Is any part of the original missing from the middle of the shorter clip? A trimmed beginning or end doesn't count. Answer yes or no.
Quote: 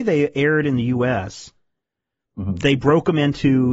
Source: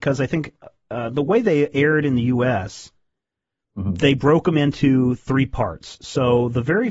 no